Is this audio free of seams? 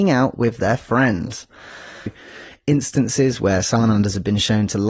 no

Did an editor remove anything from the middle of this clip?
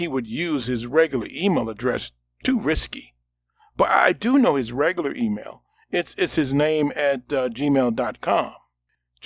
no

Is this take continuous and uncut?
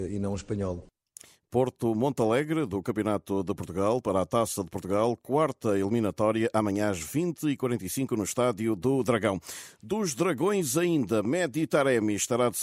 yes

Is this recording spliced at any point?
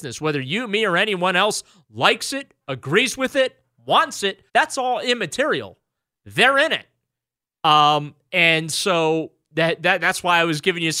yes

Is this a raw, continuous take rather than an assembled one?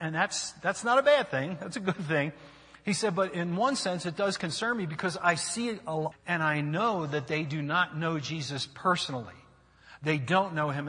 no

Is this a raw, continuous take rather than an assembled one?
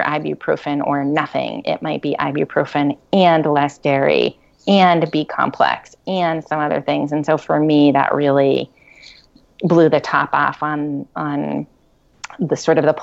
yes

